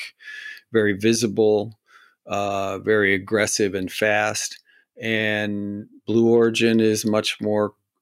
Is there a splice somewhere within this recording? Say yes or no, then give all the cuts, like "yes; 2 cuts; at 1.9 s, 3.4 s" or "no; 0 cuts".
no; 0 cuts